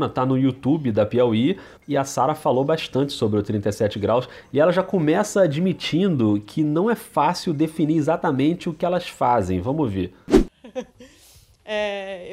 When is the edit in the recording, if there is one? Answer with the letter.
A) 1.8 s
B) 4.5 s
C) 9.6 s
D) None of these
A